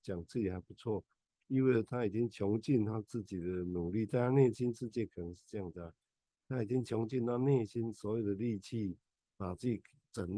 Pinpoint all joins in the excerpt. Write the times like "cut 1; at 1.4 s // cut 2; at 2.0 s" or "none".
none